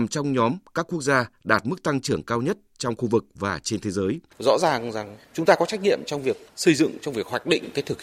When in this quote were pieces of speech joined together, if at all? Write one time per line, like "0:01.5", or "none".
0:04.3